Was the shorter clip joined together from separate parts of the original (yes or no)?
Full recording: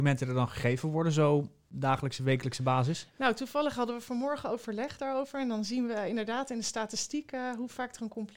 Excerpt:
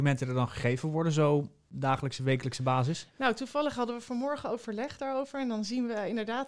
no